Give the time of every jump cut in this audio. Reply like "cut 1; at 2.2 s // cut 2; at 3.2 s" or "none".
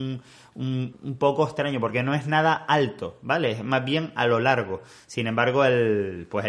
cut 1; at 0.9 s